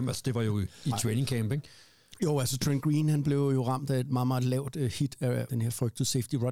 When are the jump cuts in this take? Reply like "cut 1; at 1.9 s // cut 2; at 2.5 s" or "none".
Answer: cut 1; at 5.5 s